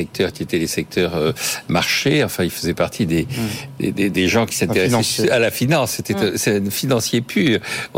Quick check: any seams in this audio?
no; 0 cuts

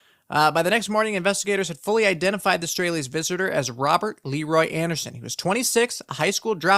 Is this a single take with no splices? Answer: yes; 0 cuts

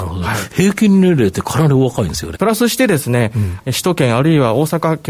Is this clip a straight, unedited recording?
no; 2 cuts; at 2.3 s, 3.6 s

